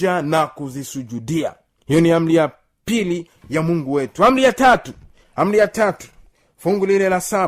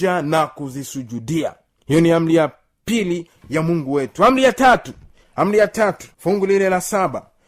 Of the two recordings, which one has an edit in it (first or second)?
second